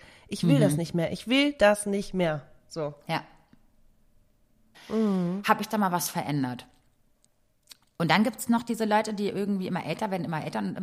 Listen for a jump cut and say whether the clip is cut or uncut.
cut